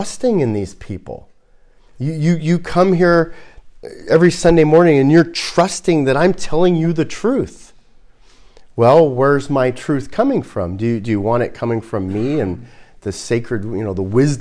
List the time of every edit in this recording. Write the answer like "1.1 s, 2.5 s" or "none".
none